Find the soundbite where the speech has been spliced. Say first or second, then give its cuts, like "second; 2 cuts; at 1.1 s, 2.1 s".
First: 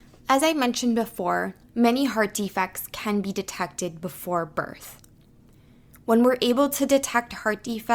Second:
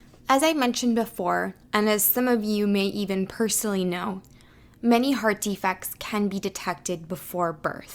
first; 1 cut; at 1.7 s